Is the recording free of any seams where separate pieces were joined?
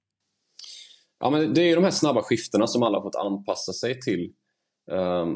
yes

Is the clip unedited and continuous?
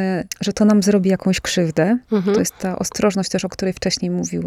yes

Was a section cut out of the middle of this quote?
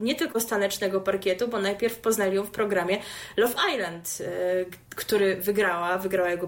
no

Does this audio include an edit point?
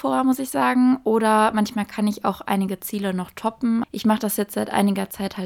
yes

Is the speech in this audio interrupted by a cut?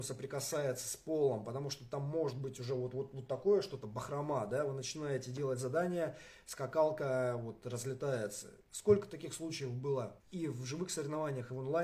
yes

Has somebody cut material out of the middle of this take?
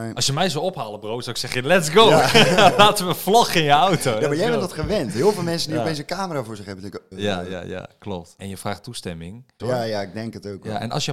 yes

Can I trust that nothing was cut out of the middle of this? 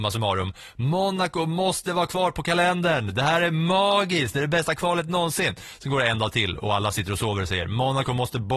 yes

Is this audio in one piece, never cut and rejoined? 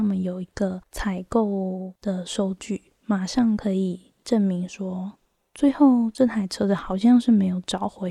no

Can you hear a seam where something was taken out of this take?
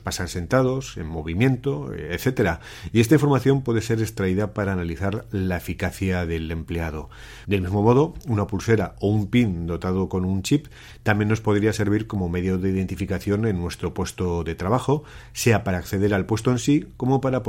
yes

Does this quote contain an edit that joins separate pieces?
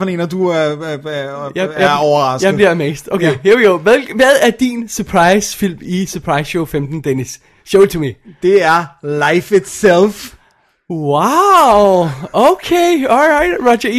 no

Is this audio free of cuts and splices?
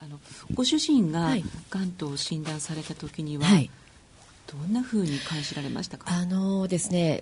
yes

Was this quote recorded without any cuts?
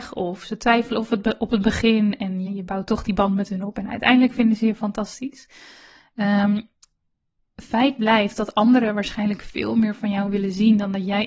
no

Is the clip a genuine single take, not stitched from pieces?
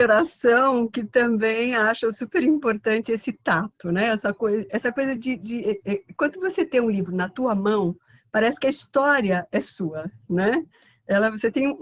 yes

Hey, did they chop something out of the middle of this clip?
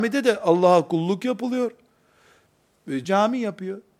yes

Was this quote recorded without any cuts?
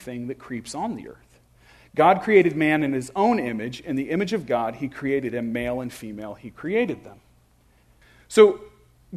yes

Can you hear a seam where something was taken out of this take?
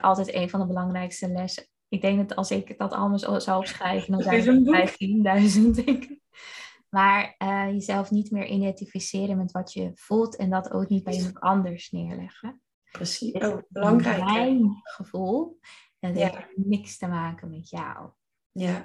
no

